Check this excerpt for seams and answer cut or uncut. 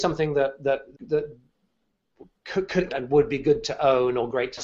cut